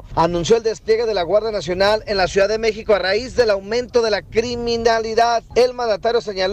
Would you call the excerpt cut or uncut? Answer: uncut